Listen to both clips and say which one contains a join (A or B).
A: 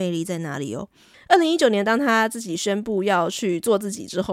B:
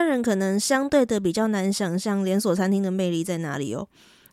A